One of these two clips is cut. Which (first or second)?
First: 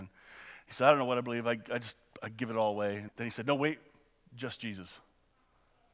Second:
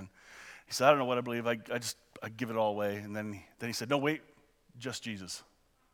first